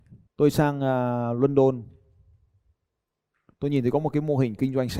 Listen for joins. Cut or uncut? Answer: uncut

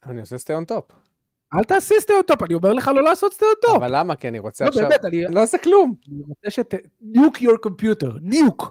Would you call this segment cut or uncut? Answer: cut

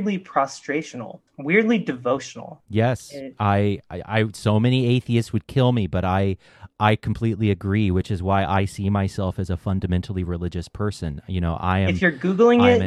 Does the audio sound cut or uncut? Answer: cut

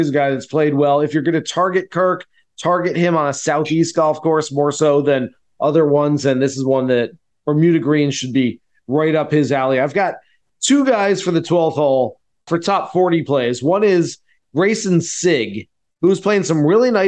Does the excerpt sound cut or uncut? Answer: uncut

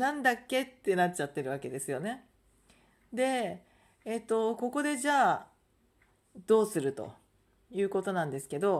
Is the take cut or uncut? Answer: uncut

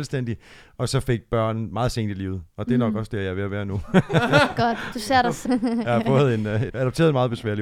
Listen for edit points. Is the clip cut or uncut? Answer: cut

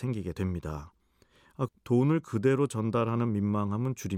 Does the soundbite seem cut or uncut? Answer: cut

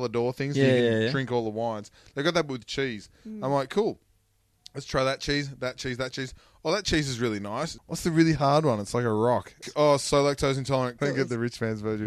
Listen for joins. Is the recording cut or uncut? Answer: cut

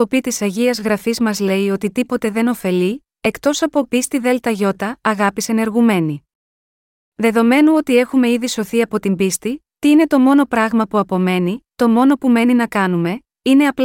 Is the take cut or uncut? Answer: uncut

